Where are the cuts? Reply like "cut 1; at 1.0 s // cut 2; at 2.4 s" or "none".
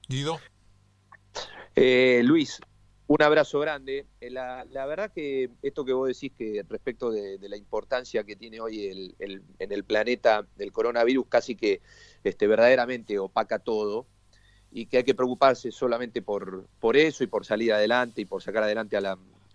none